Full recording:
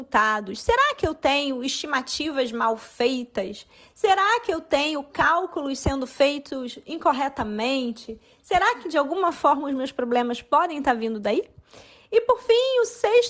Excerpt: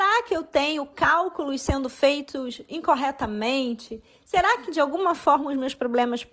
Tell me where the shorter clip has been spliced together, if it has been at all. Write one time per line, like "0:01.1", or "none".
none